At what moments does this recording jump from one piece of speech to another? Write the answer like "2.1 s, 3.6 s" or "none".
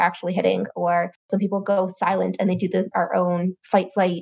2.9 s

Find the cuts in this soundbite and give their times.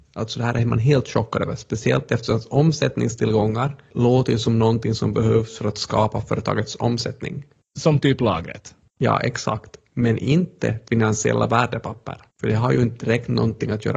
none

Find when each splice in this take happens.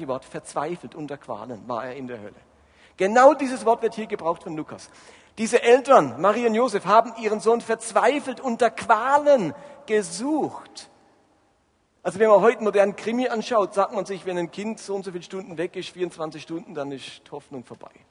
none

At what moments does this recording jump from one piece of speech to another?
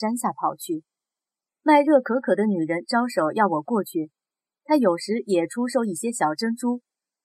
1.5 s

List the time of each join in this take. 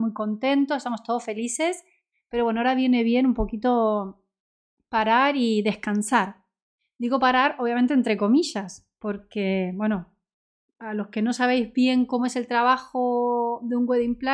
none

